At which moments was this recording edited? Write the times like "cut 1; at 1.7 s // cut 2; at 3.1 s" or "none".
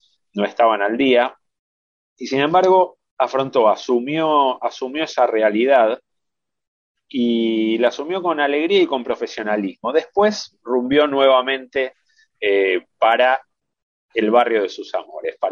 none